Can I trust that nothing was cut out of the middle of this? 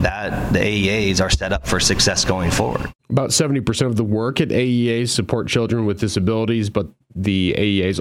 no; 1 cut; at 3.0 s

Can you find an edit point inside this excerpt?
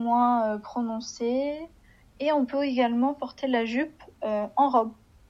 no; 0 cuts

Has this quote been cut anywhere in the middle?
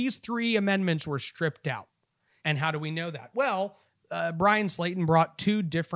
yes; 1 cut; at 2.4 s

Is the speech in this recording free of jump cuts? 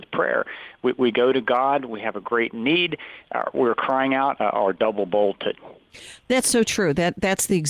no; 1 cut; at 4.4 s

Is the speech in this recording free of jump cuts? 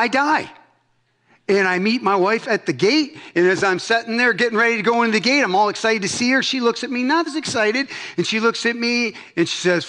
no; 1 cut; at 7.3 s

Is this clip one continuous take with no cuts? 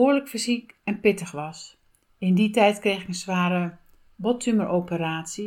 yes; 0 cuts

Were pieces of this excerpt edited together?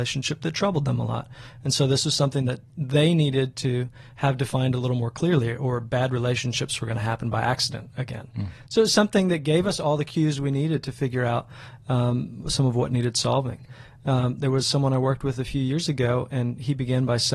no; 0 cuts

